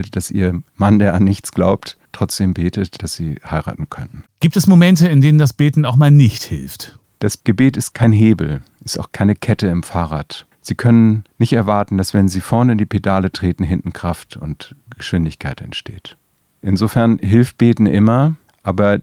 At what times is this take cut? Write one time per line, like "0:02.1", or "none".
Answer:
none